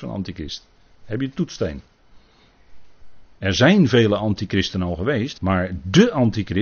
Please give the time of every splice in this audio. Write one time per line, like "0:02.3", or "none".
0:03.3
0:05.3